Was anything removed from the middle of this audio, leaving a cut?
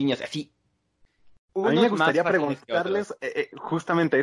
yes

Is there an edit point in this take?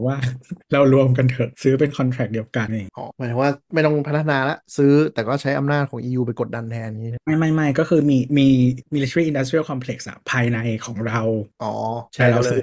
yes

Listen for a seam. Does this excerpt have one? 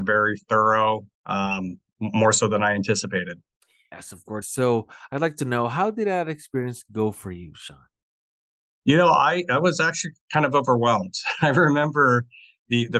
yes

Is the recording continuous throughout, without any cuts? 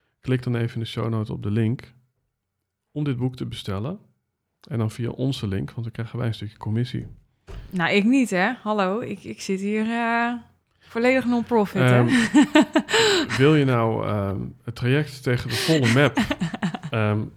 yes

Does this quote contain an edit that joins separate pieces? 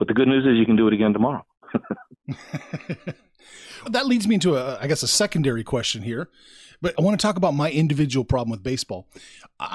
yes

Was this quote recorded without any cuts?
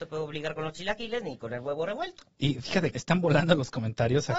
no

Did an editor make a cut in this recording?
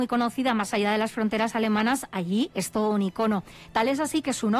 yes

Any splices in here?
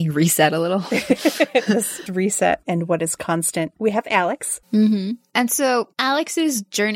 yes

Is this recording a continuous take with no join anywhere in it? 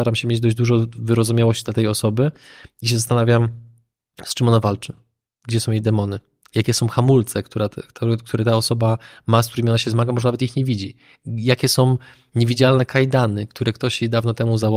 yes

